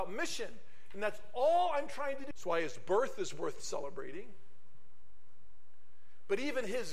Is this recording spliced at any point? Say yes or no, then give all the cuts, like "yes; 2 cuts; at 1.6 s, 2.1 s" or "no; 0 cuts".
yes; 1 cut; at 2.3 s